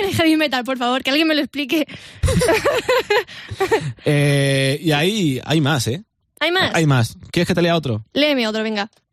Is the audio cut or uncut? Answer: uncut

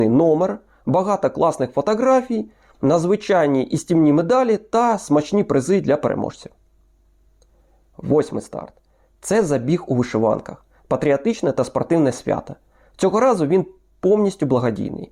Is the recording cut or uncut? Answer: uncut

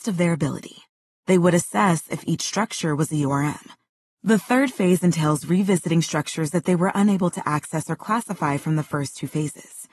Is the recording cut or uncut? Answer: uncut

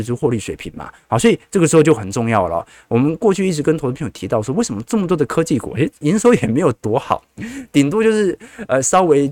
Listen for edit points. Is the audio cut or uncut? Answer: uncut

